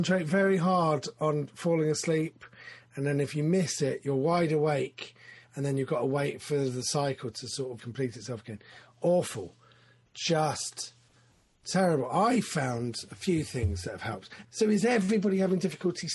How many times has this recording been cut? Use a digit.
2